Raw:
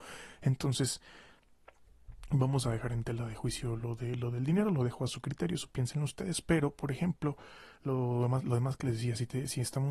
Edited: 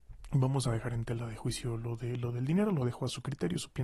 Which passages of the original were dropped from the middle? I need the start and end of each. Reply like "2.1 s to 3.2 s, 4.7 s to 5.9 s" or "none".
none